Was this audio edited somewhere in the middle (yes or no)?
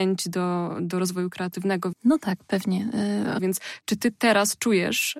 yes